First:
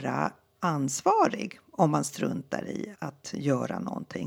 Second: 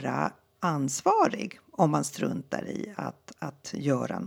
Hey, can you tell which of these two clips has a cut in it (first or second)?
first